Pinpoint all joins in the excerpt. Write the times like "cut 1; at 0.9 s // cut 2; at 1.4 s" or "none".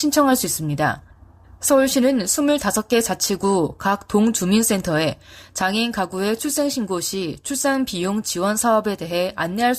none